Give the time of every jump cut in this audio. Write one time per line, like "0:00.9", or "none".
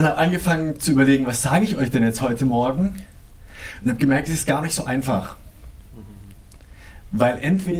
none